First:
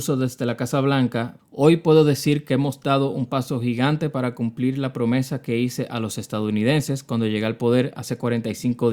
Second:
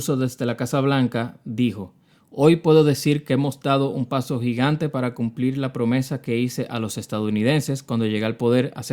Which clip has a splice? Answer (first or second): first